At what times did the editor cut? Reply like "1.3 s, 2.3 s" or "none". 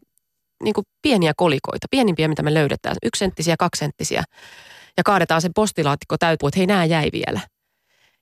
6.4 s